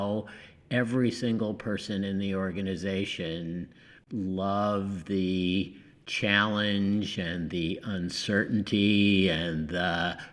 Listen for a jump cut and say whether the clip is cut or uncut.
uncut